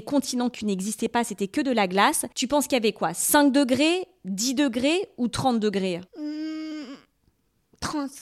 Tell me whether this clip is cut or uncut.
cut